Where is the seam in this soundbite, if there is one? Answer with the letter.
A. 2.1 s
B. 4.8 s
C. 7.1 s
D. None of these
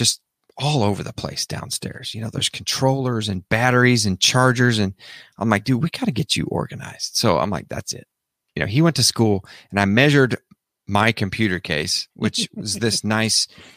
D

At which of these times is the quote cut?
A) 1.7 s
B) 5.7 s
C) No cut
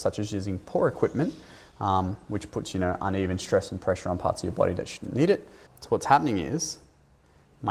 B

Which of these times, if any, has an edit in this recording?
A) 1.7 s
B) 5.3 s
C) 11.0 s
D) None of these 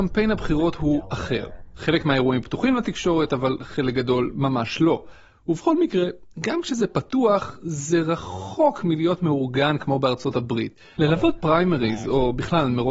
C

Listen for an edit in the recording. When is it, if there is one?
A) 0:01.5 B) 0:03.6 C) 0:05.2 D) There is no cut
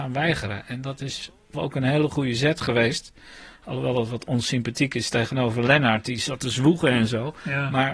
A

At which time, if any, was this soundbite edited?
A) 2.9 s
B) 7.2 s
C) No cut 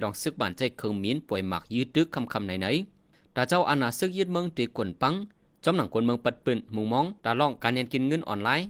B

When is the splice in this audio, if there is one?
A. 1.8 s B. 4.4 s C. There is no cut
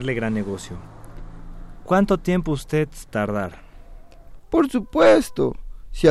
B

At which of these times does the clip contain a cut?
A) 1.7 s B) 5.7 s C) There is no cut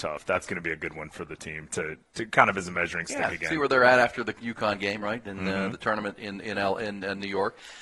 A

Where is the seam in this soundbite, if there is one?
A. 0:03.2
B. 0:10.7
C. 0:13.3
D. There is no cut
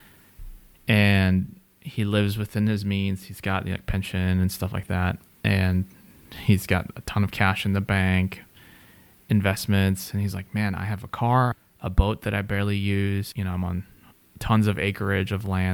D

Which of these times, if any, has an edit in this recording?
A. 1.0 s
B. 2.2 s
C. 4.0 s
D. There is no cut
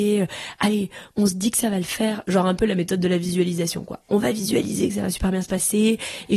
D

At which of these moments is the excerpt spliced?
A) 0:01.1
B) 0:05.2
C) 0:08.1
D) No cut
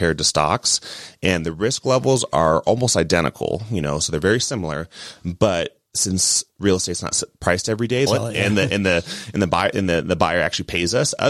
C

